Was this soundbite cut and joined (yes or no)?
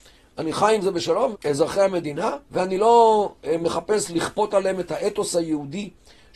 yes